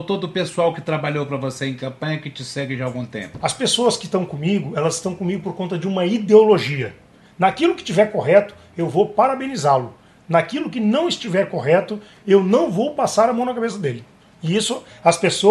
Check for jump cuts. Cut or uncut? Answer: cut